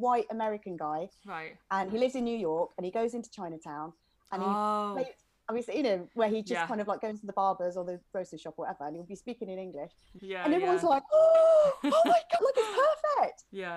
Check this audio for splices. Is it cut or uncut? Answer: cut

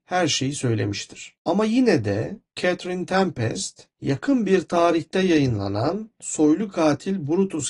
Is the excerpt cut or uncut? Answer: cut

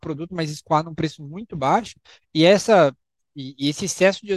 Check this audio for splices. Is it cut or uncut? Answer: uncut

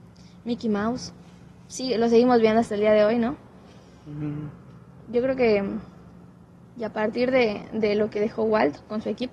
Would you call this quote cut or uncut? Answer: uncut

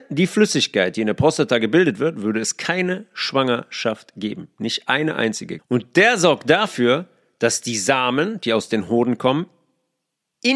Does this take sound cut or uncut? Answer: cut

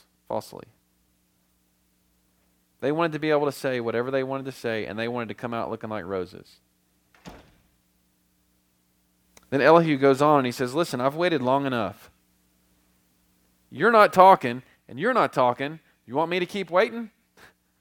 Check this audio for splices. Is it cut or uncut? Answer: uncut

